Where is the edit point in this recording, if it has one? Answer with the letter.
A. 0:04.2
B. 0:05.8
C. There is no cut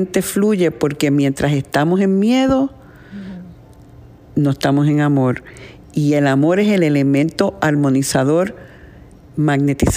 C